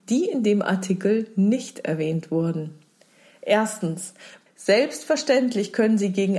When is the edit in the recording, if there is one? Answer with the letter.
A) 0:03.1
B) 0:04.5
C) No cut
B